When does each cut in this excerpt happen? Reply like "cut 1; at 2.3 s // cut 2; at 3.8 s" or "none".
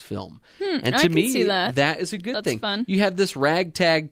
none